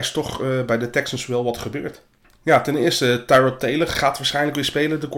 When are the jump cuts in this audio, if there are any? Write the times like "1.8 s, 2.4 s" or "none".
2.2 s